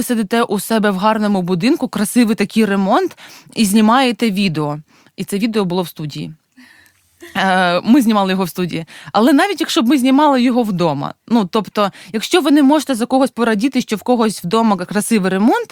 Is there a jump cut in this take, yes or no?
no